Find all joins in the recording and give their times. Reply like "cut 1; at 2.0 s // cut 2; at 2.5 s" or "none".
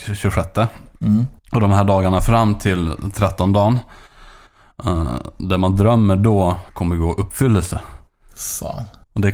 cut 1; at 6.7 s